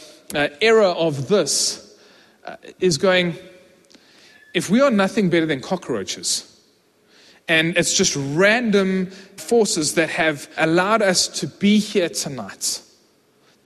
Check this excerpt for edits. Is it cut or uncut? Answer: cut